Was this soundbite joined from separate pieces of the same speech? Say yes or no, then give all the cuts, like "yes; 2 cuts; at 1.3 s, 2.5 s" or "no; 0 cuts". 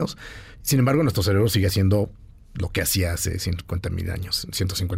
no; 0 cuts